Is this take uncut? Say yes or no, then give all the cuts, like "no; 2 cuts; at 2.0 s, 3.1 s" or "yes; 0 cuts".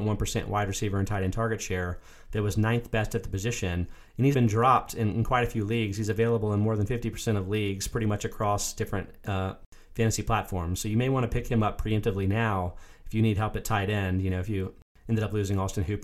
no; 1 cut; at 4.3 s